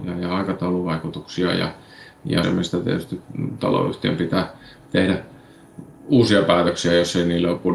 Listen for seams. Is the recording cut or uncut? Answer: cut